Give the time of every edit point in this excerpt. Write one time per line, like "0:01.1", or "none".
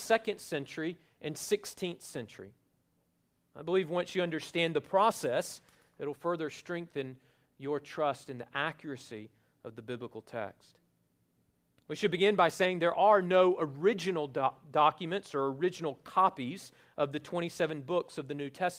0:03.4